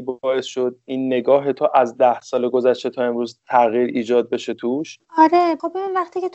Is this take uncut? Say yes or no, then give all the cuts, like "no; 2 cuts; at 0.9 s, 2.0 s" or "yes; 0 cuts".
no; 1 cut; at 5.1 s